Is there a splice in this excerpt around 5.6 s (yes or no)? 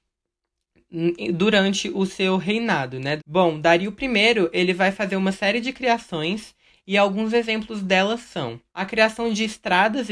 no